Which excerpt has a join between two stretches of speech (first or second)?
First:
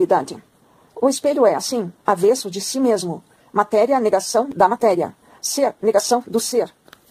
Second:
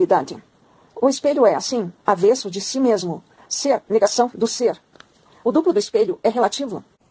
second